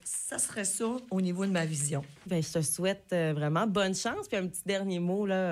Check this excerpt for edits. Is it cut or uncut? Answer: cut